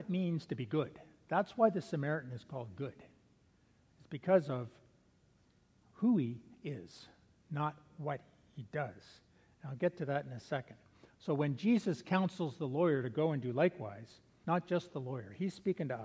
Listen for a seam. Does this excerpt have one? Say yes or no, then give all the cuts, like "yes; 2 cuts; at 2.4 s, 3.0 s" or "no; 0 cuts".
yes; 1 cut; at 14.4 s